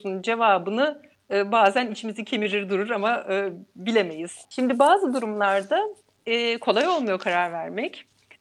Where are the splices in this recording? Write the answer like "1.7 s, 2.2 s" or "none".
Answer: 4.4 s

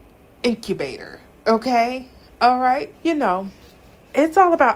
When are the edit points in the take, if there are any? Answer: 2.9 s

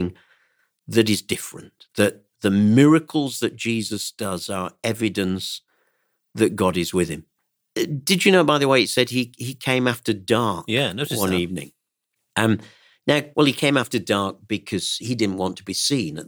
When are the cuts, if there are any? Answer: 13.3 s, 15.0 s

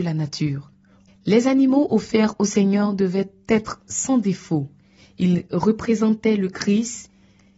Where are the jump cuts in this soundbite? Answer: 1.1 s

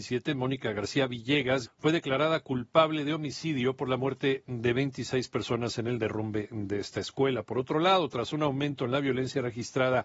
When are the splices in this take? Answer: 1.6 s

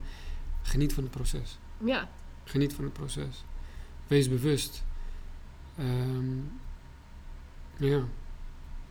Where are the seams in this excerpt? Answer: none

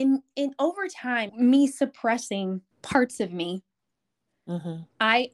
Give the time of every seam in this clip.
1.3 s, 2.7 s

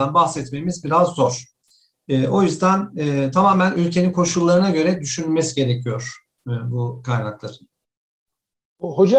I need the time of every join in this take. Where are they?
none

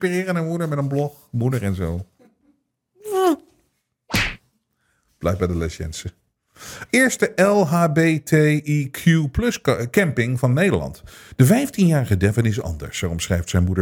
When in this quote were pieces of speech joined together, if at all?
6.9 s, 11.3 s

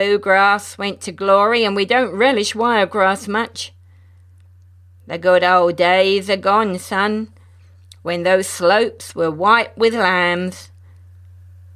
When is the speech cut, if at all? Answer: none

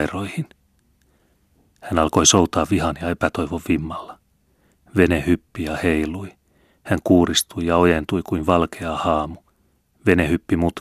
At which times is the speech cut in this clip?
none

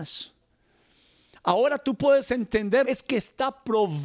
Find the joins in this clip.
2.8 s

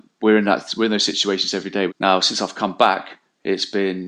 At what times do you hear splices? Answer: 1.9 s

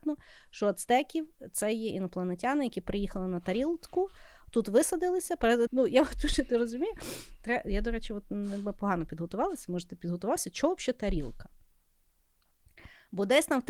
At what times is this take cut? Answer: 5.7 s

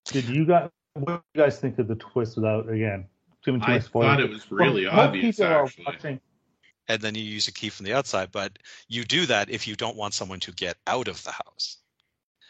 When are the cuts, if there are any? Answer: 6.7 s

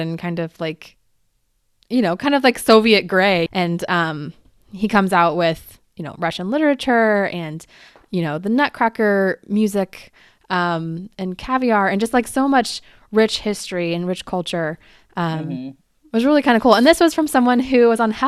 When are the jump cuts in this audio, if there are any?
3.5 s

